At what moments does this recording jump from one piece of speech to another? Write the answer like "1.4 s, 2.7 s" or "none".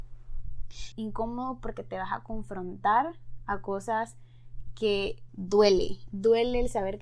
0.9 s, 5.3 s